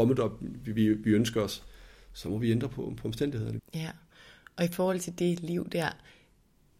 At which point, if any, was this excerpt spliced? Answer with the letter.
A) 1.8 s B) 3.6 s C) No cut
B